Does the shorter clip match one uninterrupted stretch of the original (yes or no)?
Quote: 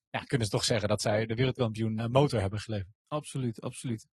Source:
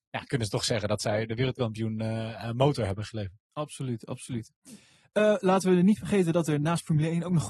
no